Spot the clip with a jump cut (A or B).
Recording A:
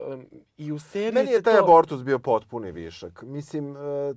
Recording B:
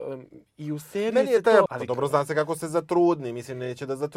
B